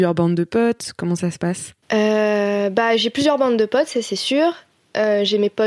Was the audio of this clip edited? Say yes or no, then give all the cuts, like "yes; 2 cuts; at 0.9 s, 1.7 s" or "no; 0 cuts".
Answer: no; 0 cuts